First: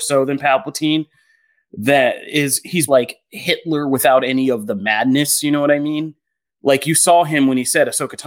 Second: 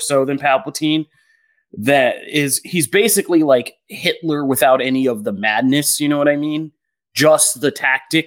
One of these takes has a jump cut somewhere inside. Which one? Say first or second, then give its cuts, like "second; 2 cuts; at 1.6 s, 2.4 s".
first; 2 cuts; at 2.9 s, 6.4 s